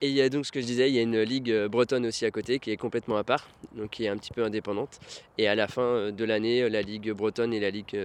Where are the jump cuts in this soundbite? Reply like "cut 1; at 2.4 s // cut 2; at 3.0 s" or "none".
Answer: none